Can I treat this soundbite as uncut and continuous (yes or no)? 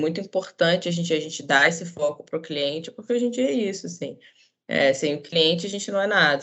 yes